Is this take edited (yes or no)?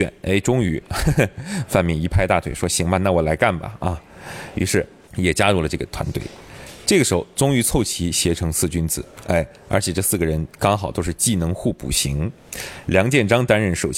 no